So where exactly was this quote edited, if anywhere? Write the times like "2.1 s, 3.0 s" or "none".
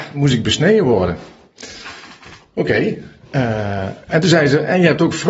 none